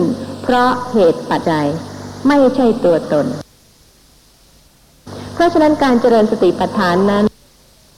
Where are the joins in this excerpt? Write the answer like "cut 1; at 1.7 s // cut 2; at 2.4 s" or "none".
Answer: cut 1; at 1.4 s